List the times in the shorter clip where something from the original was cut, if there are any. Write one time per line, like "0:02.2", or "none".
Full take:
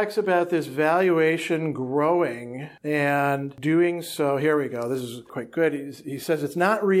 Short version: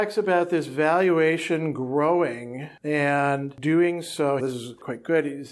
0:04.4